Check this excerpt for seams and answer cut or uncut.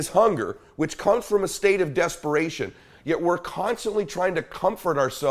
uncut